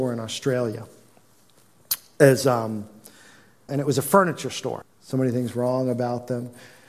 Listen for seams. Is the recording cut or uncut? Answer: cut